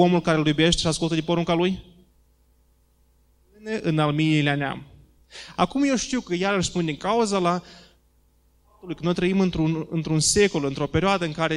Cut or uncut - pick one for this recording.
uncut